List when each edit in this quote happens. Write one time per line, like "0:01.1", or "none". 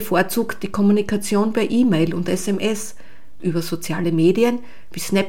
0:03.4